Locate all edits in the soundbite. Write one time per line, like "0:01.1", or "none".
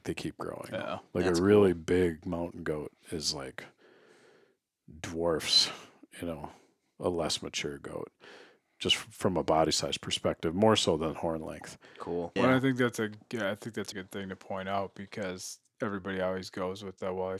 0:12.4
0:13.9